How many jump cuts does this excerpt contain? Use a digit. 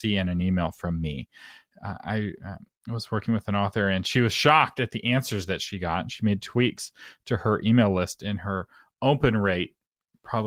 0